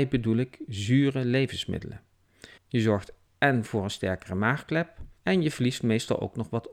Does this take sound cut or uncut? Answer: cut